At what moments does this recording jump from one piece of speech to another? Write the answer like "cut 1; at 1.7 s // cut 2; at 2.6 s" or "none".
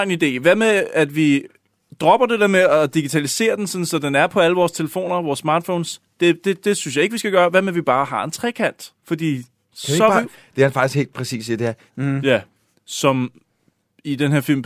cut 1; at 9.0 s // cut 2; at 11.9 s